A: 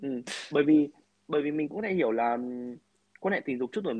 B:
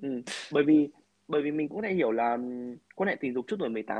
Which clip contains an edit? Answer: B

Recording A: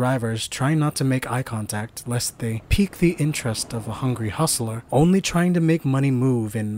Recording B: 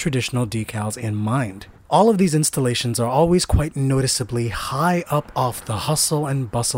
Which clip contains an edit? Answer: B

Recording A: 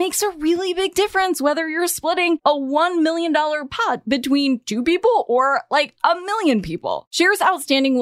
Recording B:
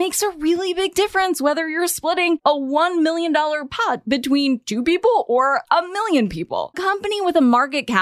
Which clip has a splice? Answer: B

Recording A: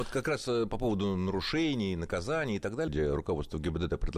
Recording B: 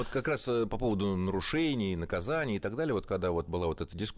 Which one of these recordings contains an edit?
A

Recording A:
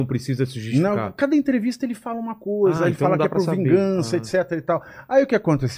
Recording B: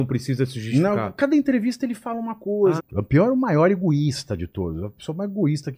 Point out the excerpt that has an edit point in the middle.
B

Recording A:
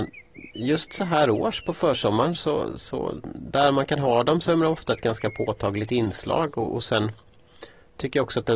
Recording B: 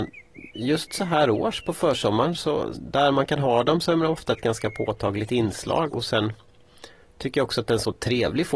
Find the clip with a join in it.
B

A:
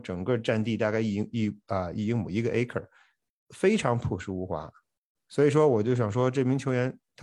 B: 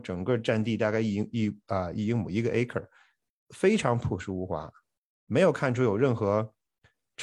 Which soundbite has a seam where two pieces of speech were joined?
A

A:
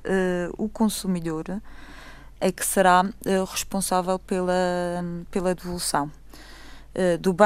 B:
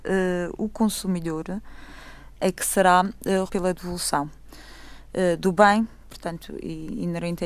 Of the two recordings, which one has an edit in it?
B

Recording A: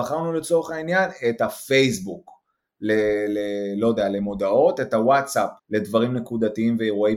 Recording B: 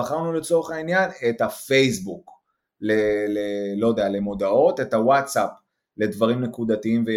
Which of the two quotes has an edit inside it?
A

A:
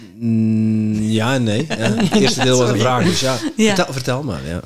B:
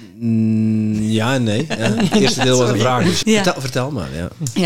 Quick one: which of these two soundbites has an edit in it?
B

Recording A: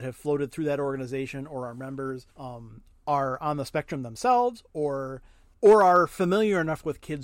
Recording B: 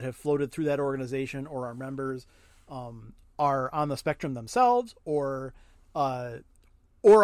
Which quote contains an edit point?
A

